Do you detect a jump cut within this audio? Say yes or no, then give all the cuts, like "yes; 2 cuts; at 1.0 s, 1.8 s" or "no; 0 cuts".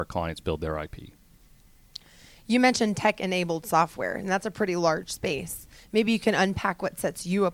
no; 0 cuts